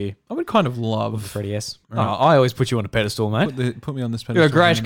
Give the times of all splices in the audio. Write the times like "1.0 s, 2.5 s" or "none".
1.8 s